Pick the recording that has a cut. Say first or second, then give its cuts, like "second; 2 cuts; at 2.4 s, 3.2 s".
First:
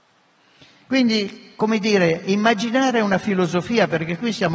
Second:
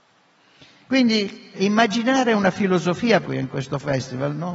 second; 2 cuts; at 1.5 s, 3.2 s